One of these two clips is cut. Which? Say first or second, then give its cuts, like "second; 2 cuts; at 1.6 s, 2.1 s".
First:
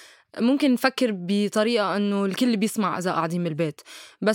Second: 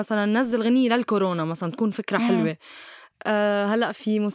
second; 1 cut; at 3.1 s